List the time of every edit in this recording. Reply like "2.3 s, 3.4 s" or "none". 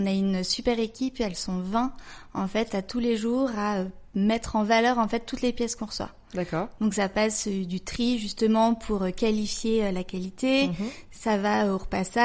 none